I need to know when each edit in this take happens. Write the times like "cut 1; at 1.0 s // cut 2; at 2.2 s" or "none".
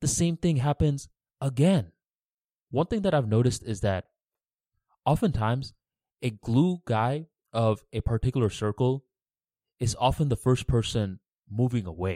cut 1; at 2.7 s